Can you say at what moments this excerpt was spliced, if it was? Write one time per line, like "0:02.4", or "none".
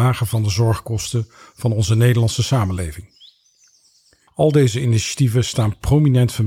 0:04.3